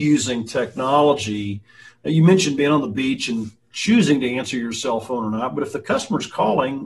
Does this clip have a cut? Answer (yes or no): no